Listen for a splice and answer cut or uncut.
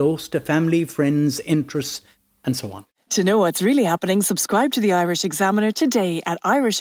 uncut